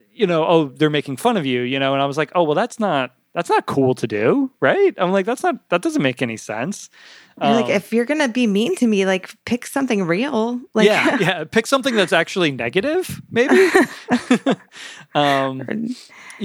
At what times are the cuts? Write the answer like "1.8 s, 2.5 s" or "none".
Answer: none